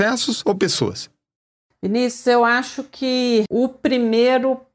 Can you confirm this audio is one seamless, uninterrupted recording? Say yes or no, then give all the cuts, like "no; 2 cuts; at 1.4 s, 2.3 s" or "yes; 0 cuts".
yes; 0 cuts